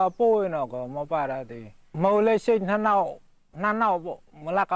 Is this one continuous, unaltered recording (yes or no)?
no